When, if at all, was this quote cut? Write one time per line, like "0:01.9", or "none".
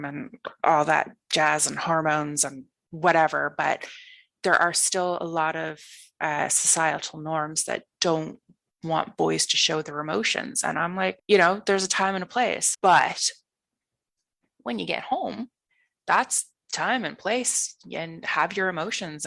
0:11.2
0:12.7
0:16.0